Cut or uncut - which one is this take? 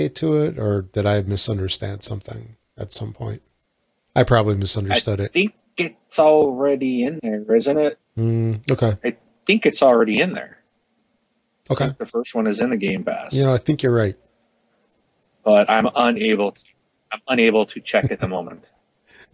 uncut